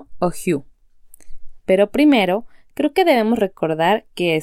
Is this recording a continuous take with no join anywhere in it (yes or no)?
no